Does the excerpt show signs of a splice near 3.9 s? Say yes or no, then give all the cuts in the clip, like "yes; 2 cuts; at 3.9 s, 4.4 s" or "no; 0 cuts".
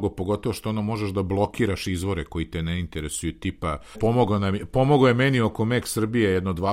yes; 1 cut; at 3.9 s